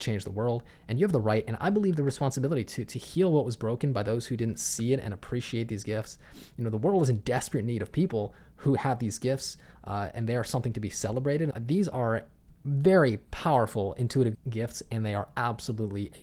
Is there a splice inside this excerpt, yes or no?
yes